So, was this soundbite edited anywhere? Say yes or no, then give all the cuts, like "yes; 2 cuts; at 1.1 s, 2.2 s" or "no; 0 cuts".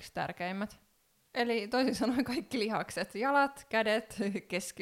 yes; 1 cut; at 1.3 s